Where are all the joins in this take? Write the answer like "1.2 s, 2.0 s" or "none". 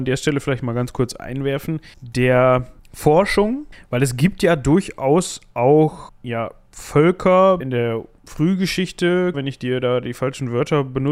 7.6 s, 9.3 s